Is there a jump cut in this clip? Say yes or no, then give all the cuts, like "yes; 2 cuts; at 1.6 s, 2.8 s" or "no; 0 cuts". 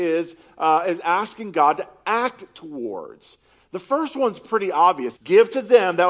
yes; 1 cut; at 5.1 s